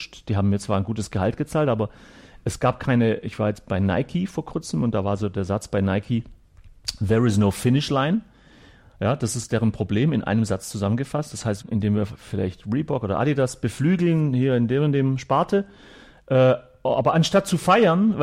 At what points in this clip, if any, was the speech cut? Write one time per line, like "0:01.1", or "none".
0:11.6